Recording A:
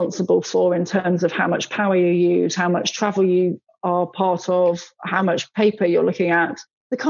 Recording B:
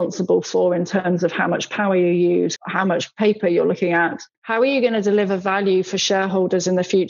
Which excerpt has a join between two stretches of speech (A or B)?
B